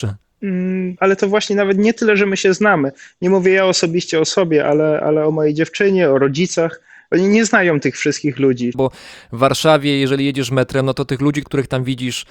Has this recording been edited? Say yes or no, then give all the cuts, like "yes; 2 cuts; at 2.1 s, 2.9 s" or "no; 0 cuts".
yes; 1 cut; at 8.7 s